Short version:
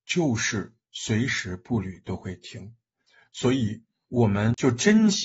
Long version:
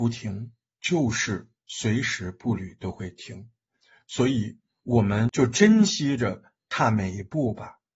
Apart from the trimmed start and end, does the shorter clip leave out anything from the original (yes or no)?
no